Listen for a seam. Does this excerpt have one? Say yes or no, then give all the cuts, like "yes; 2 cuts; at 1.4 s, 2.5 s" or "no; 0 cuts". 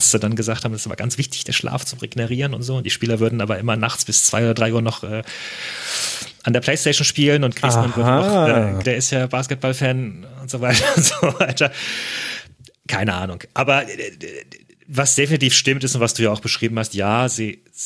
yes; 1 cut; at 8.8 s